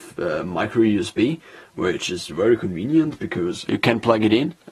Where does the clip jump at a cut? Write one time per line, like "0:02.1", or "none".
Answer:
0:03.7